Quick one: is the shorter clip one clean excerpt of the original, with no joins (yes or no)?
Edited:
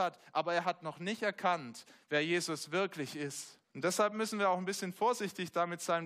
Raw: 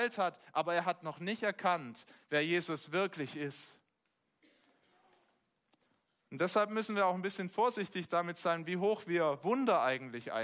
no